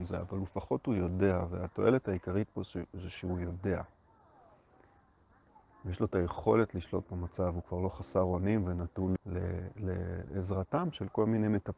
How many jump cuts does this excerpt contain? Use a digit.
1